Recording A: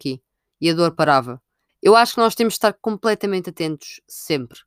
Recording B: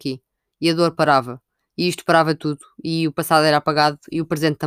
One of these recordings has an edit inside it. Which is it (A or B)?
A